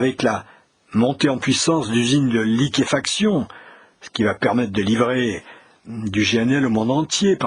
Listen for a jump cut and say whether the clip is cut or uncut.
uncut